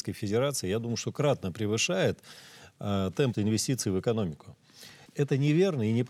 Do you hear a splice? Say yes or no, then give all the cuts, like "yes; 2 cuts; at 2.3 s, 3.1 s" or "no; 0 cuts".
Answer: yes; 2 cuts; at 3.3 s, 5.1 s